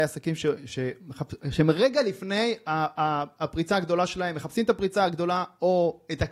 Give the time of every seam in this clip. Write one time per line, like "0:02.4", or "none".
none